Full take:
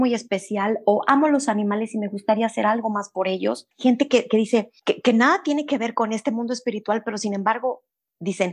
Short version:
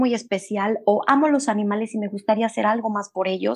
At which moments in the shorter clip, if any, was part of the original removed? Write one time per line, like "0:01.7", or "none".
none